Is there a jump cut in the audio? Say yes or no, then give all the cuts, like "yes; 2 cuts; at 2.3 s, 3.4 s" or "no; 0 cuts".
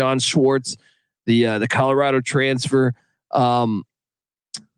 no; 0 cuts